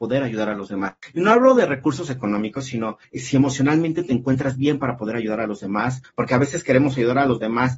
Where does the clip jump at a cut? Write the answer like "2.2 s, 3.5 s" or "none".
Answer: none